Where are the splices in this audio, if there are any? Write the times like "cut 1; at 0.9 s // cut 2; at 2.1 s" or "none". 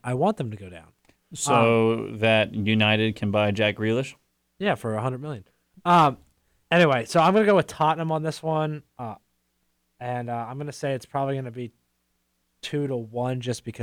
none